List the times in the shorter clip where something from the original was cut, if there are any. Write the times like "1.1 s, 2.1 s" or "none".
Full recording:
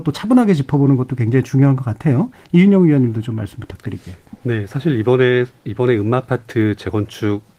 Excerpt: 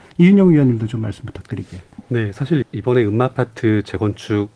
2.6 s